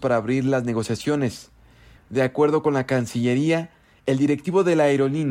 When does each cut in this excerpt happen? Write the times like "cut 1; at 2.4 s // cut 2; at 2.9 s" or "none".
cut 1; at 2.0 s